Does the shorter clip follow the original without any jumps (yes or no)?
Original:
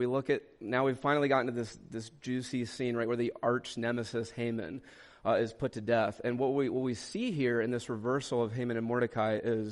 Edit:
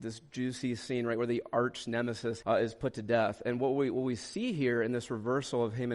no